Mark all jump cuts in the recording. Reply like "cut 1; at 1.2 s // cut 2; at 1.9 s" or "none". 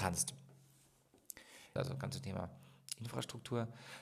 cut 1; at 1.8 s